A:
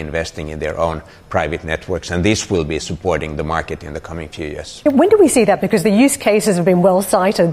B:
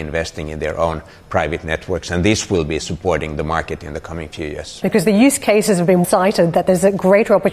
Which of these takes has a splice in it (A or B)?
B